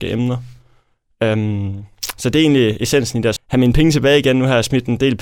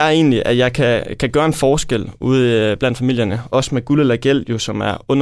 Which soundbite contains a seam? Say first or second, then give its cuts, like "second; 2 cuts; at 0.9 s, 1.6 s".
first; 1 cut; at 3.4 s